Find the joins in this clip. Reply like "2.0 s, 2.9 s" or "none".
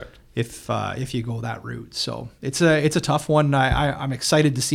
none